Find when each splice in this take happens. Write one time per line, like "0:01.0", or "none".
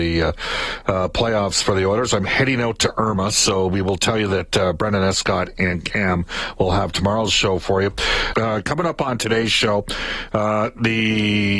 0:08.3

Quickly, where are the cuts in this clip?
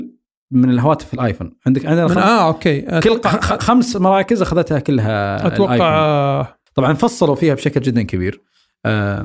0:06.7

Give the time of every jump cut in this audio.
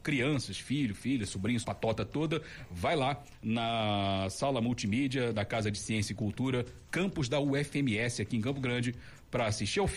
0:01.6

